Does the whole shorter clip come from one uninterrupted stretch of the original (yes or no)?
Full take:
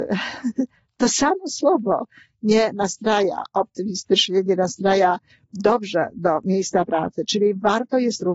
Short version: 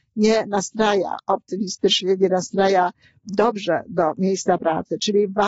yes